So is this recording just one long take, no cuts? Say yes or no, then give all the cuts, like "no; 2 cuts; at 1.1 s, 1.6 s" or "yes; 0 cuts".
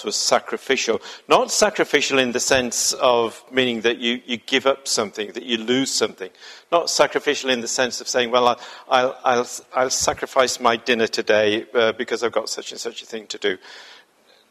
yes; 0 cuts